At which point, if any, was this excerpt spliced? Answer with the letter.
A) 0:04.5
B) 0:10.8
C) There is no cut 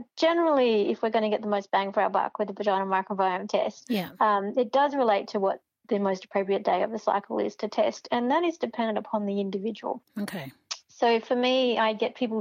C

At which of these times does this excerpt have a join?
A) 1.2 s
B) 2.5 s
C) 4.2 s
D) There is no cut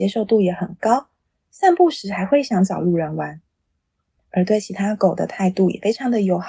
D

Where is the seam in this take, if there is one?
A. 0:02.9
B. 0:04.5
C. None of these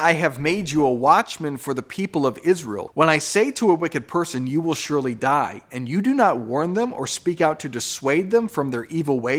A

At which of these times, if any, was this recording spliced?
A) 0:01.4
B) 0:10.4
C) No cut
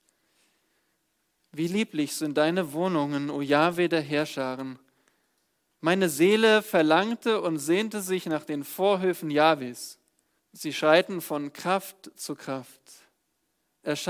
B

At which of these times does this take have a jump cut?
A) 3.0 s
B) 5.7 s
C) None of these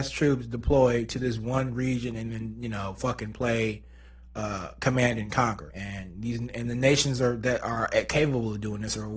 B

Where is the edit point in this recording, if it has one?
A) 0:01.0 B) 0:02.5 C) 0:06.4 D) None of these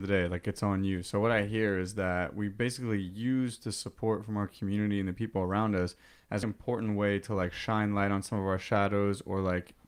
C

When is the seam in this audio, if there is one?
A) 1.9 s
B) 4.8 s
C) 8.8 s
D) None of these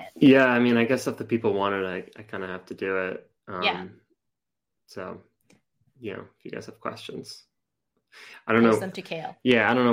D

